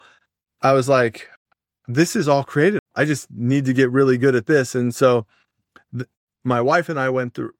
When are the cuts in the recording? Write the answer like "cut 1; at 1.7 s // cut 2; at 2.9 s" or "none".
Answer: cut 1; at 2.8 s

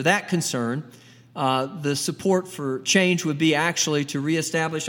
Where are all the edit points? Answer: none

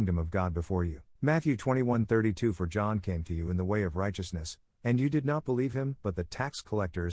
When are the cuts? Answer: cut 1; at 1.2 s

